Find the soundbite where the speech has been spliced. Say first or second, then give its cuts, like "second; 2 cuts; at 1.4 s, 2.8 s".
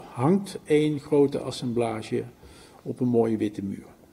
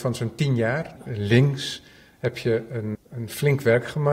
second; 2 cuts; at 1.0 s, 2.9 s